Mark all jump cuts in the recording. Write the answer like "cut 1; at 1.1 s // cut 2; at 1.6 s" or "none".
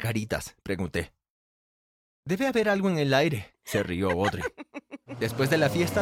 none